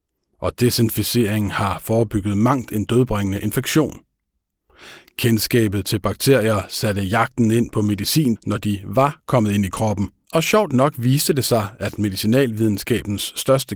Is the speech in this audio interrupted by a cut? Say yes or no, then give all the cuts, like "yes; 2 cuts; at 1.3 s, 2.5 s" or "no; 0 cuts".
yes; 2 cuts; at 8.4 s, 10.2 s